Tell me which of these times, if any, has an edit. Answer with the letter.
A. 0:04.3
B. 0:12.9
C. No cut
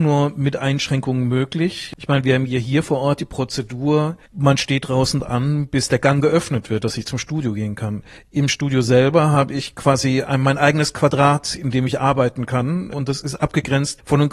A